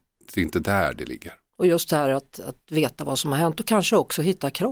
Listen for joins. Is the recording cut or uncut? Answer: uncut